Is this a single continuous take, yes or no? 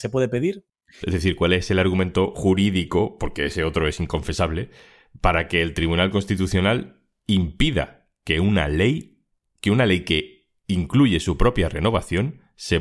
no